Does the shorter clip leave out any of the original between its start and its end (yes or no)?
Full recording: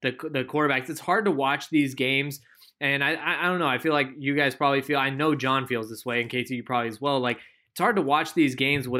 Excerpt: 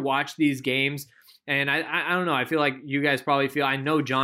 no